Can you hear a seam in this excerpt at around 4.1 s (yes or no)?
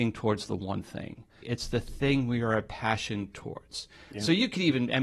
no